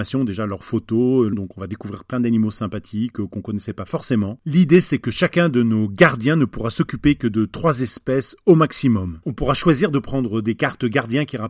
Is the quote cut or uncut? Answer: cut